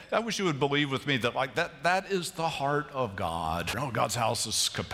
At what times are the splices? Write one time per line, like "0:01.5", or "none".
0:03.7